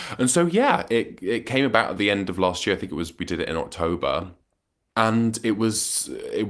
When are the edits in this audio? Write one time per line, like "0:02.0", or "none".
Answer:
none